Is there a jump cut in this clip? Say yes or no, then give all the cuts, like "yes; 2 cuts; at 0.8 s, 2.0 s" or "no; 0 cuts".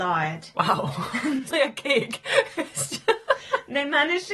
yes; 1 cut; at 1.5 s